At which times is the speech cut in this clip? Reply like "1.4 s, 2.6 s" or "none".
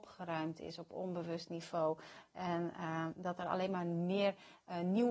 none

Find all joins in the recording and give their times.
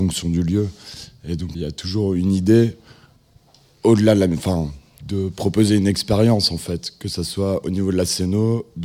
1.5 s, 5.0 s

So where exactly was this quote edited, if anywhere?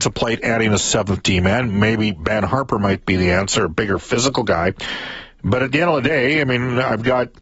none

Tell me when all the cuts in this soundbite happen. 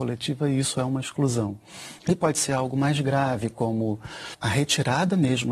2.0 s

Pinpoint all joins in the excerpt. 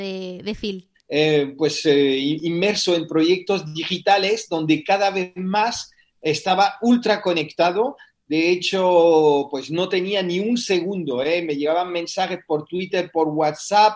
0.9 s

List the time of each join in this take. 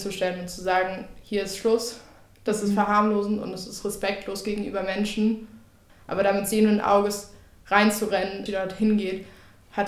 5.9 s, 8.5 s

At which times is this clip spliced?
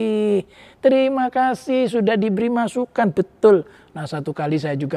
none

